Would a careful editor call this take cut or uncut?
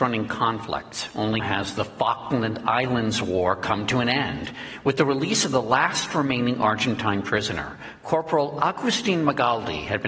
cut